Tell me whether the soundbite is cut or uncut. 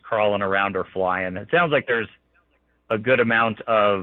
uncut